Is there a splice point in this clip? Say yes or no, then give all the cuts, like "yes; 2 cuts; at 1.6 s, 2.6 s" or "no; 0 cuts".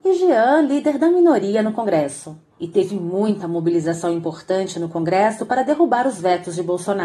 no; 0 cuts